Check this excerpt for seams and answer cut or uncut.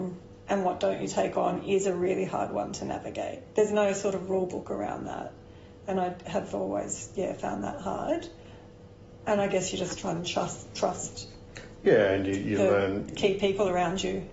uncut